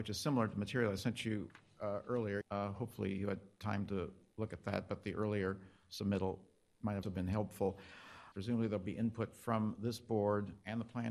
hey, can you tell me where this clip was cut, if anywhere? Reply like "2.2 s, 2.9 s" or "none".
2.4 s, 7.0 s, 8.3 s